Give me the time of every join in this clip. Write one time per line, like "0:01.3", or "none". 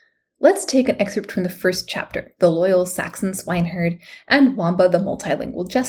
0:02.4